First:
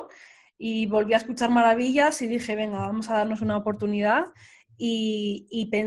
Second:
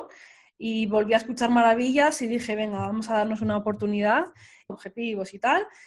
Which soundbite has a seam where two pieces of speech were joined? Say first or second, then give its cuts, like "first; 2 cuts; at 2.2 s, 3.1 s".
second; 1 cut; at 4.7 s